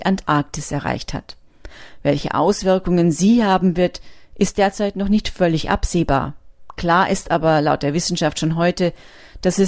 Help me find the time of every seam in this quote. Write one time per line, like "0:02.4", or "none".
none